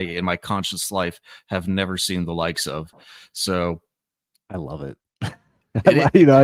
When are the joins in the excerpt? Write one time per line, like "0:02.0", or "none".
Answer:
none